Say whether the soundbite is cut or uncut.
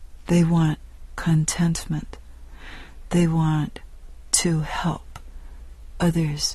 uncut